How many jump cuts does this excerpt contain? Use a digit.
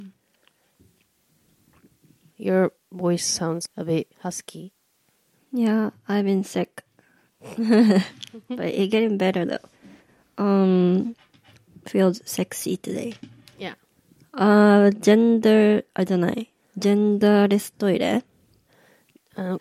1